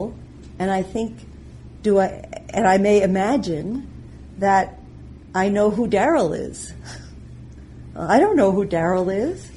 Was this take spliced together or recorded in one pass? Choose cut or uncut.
uncut